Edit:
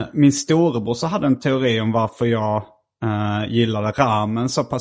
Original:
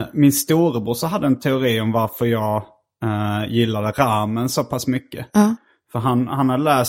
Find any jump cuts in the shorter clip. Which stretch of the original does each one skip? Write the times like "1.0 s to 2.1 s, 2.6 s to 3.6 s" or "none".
none

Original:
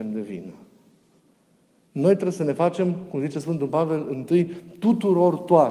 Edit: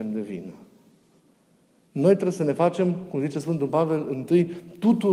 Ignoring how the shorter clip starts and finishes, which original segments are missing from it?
none

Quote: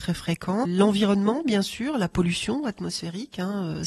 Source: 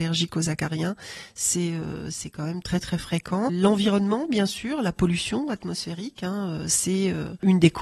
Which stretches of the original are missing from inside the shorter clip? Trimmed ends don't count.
none

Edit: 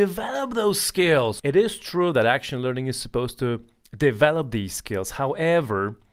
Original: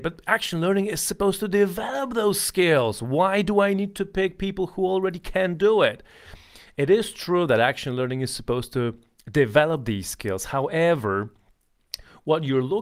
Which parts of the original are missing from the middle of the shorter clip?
3.0 s to 6.7 s

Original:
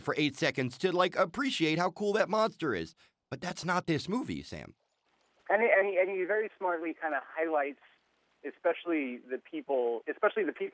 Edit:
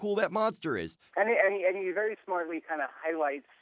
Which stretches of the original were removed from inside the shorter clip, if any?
3.1 s to 5.4 s

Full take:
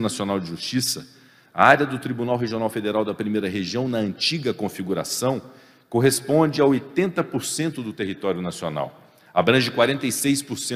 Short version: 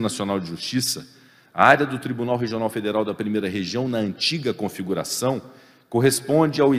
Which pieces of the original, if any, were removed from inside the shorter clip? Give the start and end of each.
none

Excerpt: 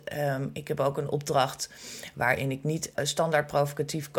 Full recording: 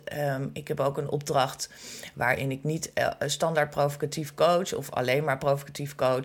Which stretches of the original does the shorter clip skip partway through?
2.9 s to 3.2 s

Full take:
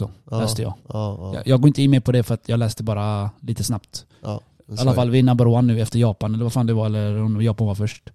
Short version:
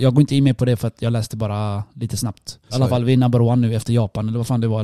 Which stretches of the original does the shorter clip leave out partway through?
4.2 s to 4.8 s

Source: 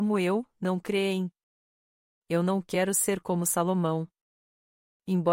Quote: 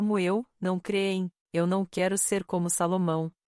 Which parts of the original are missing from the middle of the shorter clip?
1.4 s to 2.2 s

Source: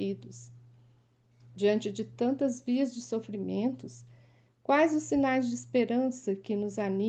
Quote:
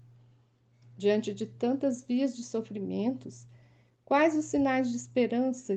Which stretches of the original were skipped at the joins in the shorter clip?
none

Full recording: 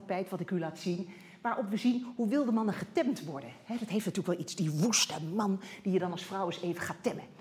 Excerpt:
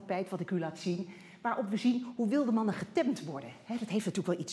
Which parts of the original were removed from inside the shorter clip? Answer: none

